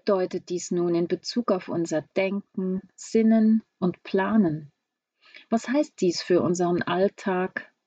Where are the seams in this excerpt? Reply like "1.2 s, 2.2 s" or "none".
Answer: none